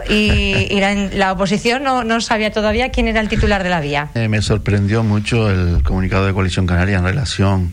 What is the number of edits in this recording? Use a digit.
1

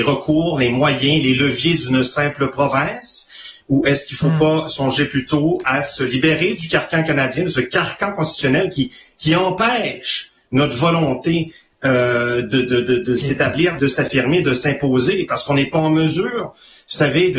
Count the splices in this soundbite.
1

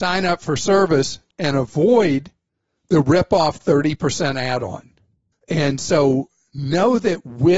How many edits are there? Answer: 1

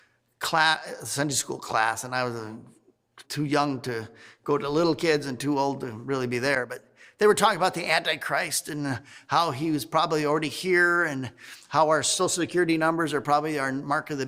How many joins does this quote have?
1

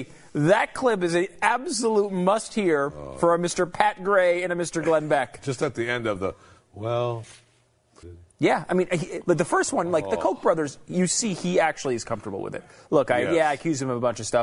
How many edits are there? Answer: 1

